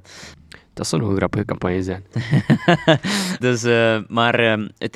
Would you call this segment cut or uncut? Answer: cut